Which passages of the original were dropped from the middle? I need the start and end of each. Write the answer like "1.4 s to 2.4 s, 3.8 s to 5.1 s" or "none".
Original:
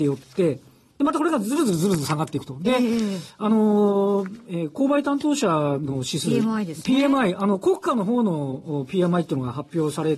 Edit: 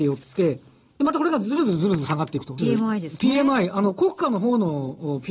2.6 s to 6.2 s